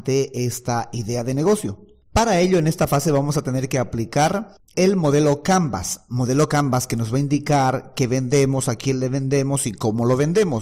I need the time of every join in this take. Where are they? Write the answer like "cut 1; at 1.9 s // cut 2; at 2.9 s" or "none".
none

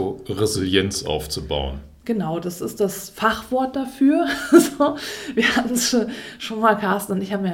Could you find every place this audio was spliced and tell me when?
none

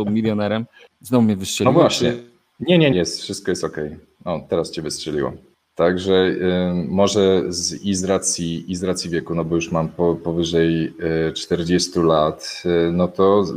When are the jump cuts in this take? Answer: cut 1; at 2.9 s

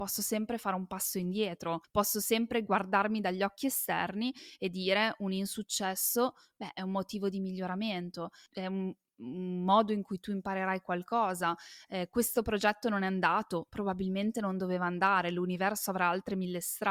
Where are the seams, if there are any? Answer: none

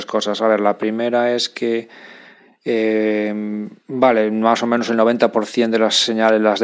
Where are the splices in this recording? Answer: cut 1; at 3.8 s

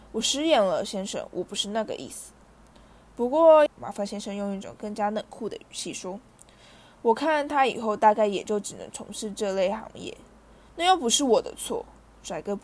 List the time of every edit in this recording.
cut 1; at 3.7 s

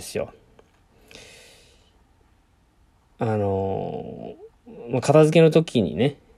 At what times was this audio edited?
none

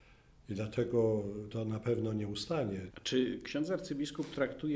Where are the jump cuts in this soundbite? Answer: cut 1; at 1.5 s // cut 2; at 2.9 s

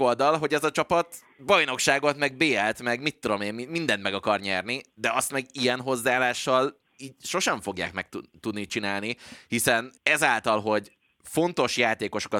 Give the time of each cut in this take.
cut 1; at 10.0 s

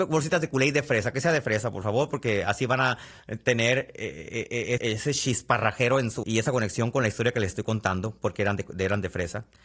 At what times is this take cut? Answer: cut 1; at 4.8 s // cut 2; at 6.2 s

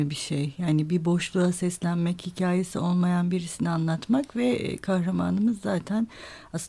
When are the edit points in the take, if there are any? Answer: none

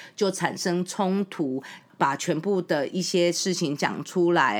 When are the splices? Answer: cut 1; at 1.8 s

